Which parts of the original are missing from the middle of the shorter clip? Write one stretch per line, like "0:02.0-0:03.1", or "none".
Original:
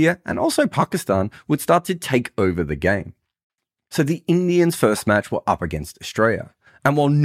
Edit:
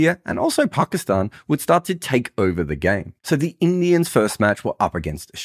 0:03.2-0:03.9